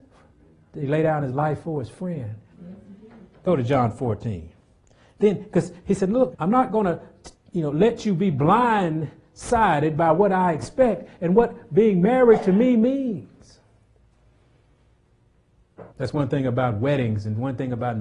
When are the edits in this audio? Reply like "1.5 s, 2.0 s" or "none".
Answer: 2.5 s, 6.3 s, 15.9 s

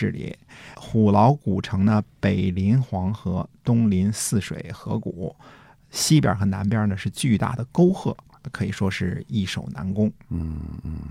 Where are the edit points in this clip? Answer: none

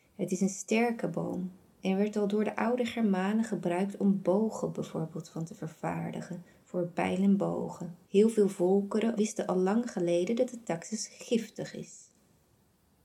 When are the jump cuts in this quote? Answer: 8.0 s, 9.2 s

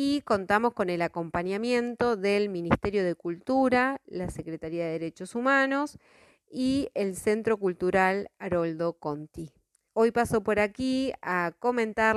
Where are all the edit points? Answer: 9.9 s

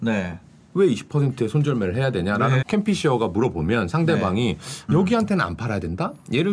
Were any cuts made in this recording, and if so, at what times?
2.6 s, 4.9 s

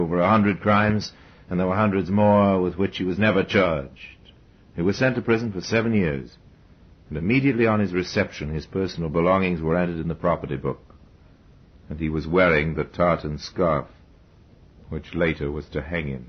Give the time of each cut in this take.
none

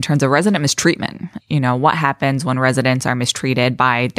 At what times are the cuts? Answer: 1.4 s

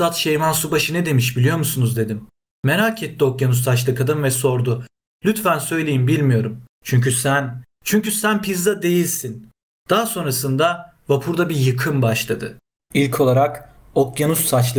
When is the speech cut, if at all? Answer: 6.7 s

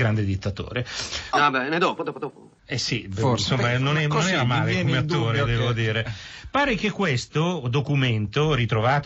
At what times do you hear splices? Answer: 1.3 s, 2.6 s

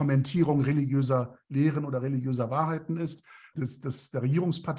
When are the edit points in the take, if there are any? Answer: 3.5 s

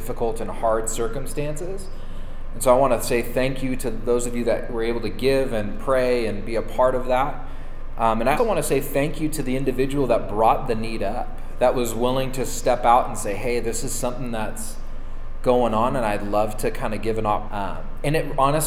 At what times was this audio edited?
8.4 s, 17.5 s

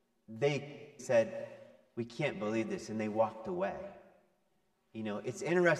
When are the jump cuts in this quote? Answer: 1.0 s

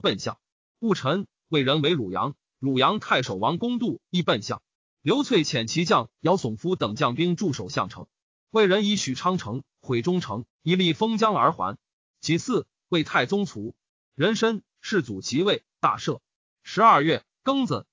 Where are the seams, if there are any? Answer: none

